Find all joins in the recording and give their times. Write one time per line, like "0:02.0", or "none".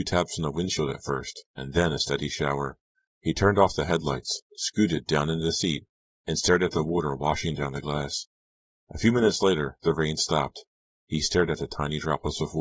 none